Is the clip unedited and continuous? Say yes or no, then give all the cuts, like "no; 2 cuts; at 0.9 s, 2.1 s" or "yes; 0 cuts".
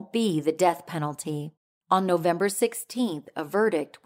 yes; 0 cuts